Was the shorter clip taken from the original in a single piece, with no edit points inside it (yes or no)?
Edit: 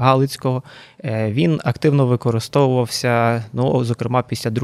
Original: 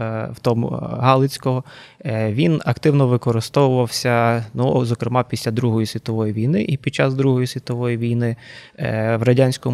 yes